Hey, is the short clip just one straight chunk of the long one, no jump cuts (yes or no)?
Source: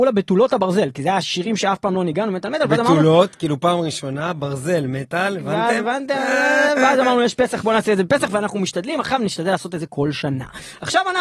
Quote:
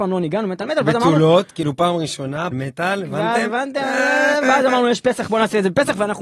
no